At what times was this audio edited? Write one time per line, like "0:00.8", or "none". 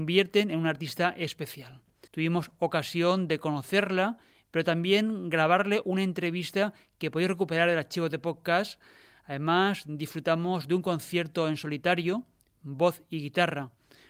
0:02.1